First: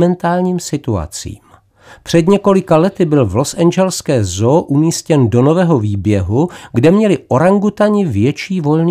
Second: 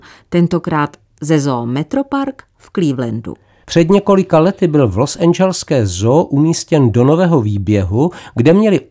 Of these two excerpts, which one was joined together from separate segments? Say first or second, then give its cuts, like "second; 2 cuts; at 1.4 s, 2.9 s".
second; 1 cut; at 3.6 s